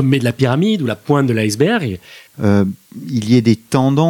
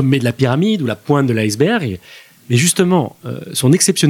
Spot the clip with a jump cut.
first; 1 cut; at 2.3 s

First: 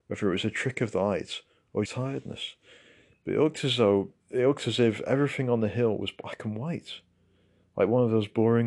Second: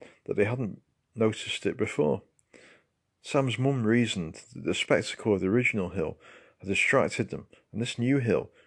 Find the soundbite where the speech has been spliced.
first; 2 cuts; at 1.9 s, 4.2 s

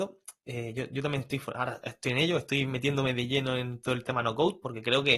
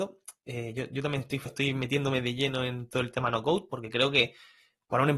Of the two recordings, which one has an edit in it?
second; 1 cut; at 1.5 s

